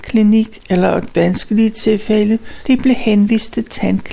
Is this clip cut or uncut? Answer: cut